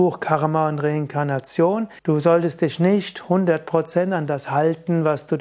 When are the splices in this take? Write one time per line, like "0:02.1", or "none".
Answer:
0:02.0